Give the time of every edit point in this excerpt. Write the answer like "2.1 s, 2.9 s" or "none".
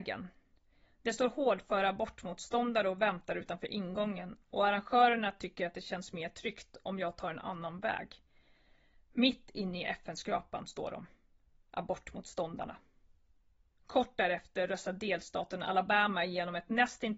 none